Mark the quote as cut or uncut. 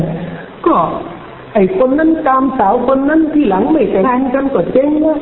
cut